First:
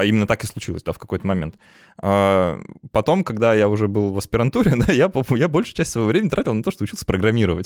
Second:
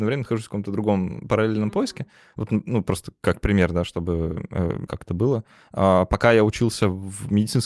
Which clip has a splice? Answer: second; 1 cut; at 4.9 s

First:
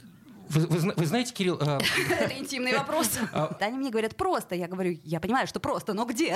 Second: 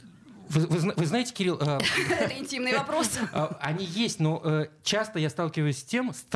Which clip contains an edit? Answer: first; 1 cut; at 3.6 s

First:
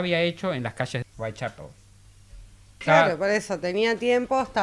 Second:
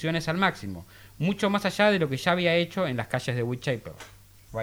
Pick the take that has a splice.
first; 2 cuts; at 1.0 s, 2.8 s

